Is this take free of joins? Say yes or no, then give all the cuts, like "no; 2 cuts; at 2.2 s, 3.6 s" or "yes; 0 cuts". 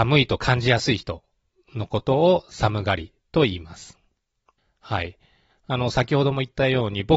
yes; 0 cuts